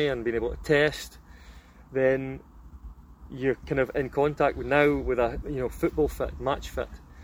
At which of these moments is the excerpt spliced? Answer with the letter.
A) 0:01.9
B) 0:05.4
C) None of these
B